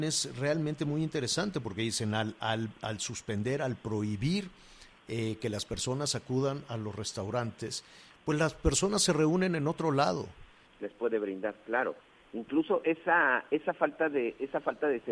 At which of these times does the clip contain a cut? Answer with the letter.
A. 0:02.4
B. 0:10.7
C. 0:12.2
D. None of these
B